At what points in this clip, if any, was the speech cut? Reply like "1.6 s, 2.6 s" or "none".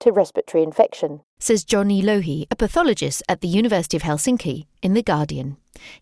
1.3 s